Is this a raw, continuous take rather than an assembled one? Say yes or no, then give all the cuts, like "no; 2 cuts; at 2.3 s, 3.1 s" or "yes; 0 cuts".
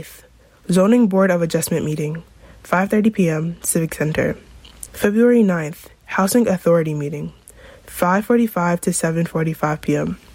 no; 1 cut; at 4.9 s